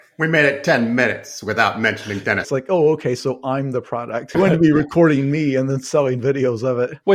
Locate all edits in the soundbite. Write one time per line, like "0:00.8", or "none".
0:02.4
0:04.3